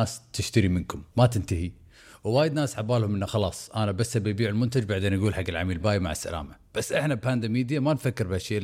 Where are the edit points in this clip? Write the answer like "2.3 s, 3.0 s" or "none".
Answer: 1.1 s, 5.8 s